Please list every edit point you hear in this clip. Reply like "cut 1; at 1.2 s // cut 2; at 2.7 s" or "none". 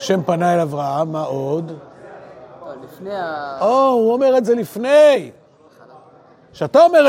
none

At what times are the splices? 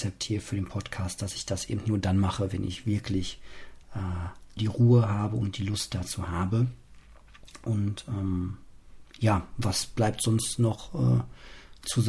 cut 1; at 4.6 s

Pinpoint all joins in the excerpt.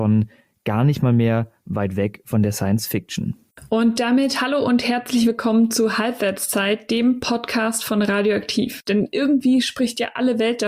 cut 1; at 1.6 s // cut 2; at 8.8 s

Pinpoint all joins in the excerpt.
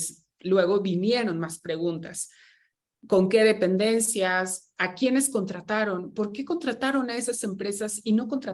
none

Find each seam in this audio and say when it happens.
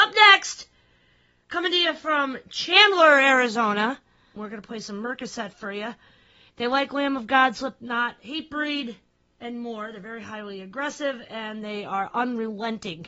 cut 1; at 4.4 s

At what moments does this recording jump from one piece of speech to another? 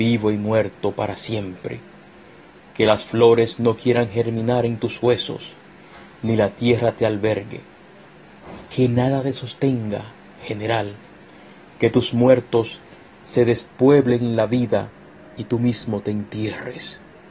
none

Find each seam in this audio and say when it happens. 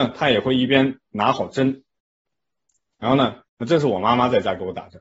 cut 1; at 3.5 s

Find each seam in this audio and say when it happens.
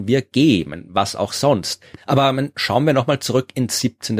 cut 1; at 2.0 s

